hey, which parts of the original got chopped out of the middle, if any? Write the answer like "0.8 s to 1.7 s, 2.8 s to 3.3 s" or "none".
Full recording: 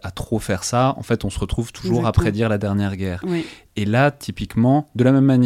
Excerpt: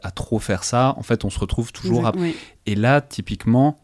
2.1 s to 3.2 s